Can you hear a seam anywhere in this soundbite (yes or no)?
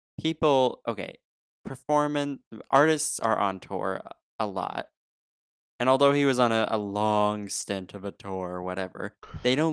no